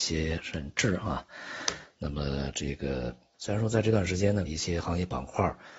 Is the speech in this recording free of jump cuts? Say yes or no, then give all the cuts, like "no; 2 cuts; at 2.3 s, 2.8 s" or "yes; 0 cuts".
no; 2 cuts; at 3.3 s, 4.5 s